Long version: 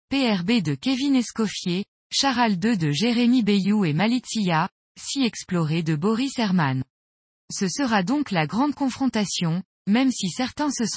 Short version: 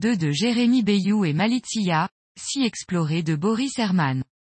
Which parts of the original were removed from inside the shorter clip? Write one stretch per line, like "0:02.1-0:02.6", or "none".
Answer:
none